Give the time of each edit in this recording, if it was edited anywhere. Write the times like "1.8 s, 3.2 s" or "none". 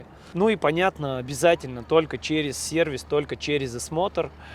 none